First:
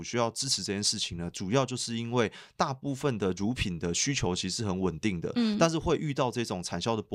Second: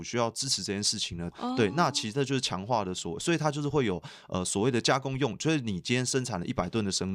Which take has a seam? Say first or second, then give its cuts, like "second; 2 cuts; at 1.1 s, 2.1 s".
second; 1 cut; at 1.3 s